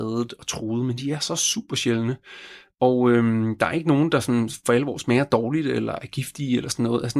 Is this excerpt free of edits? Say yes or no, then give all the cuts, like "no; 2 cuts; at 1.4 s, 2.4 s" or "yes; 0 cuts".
yes; 0 cuts